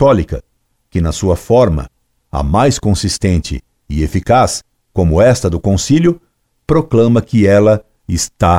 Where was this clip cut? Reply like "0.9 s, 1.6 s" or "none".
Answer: none